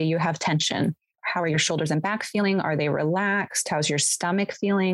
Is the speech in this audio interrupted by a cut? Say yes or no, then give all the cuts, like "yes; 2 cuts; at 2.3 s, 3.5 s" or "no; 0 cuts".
yes; 1 cut; at 1.1 s